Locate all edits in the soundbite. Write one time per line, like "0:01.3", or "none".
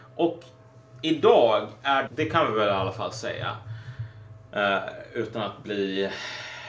0:02.1